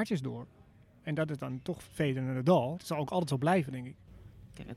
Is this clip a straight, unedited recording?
no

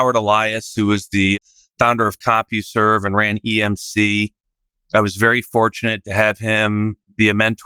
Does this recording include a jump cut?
no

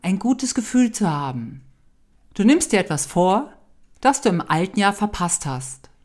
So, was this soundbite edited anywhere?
yes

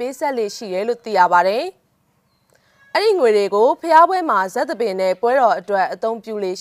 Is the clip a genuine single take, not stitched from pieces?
yes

